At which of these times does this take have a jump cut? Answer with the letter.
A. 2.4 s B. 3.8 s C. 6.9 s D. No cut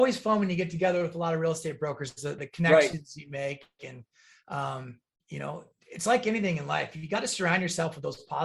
A